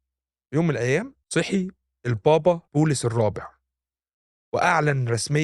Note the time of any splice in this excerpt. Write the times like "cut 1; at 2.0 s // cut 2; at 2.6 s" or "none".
cut 1; at 1.2 s // cut 2; at 2.7 s